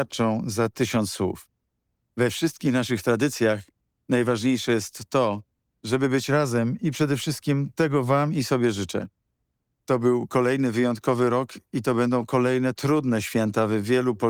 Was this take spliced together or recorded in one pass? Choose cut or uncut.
uncut